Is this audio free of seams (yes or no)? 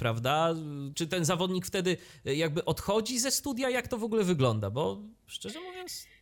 no